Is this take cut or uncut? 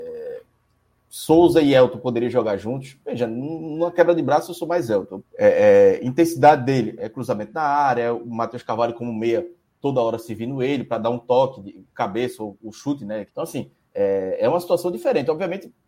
cut